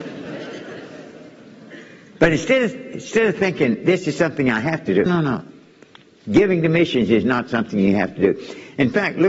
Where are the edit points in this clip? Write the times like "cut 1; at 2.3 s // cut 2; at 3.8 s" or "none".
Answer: cut 1; at 5.1 s